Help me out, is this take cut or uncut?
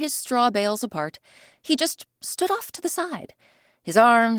uncut